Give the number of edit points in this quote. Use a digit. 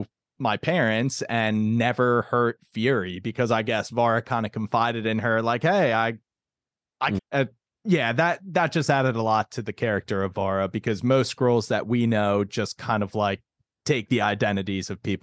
1